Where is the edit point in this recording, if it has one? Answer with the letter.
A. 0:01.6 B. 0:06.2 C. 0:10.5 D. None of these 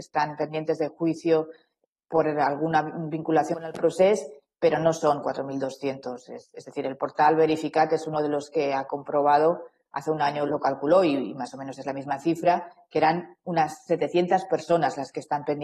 C